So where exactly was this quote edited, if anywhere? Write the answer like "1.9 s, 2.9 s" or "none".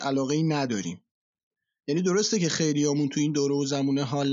1.7 s